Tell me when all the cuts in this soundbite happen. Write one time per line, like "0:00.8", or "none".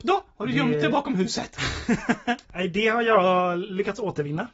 0:02.4